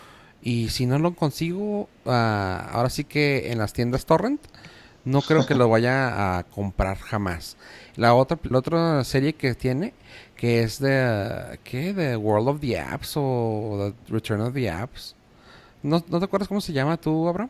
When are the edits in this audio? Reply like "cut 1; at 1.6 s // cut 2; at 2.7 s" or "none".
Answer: cut 1; at 8.5 s